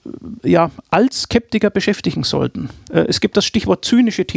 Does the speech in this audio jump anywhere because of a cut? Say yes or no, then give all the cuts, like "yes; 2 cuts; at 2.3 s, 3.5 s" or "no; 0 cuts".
yes; 1 cut; at 2.9 s